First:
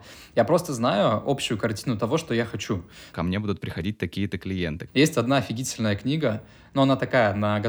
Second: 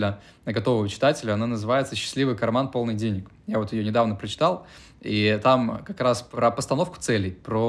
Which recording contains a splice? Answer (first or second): first